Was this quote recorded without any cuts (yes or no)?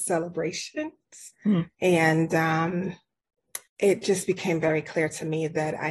no